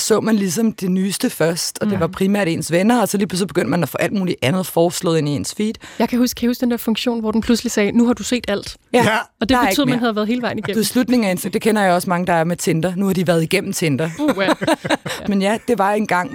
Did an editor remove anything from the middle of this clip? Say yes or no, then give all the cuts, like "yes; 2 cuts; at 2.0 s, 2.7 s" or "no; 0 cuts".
yes; 2 cuts; at 14.2 s, 15.3 s